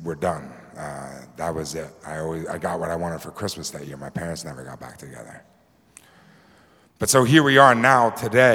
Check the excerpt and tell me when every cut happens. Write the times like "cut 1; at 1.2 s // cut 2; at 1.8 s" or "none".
none